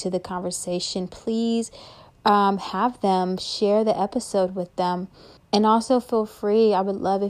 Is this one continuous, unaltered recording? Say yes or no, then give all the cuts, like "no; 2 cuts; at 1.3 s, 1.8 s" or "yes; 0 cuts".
no; 1 cut; at 5.4 s